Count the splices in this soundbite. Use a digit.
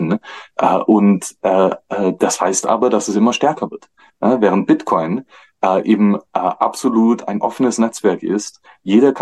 1